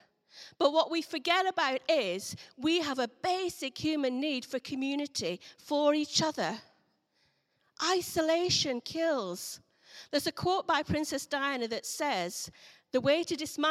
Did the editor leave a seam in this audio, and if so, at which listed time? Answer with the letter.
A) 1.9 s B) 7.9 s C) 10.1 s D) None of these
A